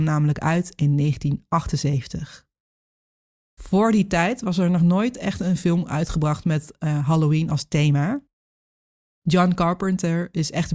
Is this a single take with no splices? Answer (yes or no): yes